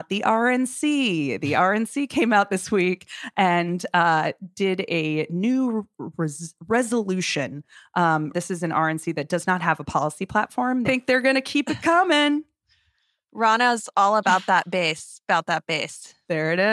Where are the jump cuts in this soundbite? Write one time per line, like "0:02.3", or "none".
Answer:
0:08.3
0:10.8